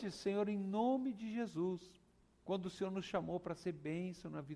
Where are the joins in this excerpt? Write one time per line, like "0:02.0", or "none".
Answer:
0:02.4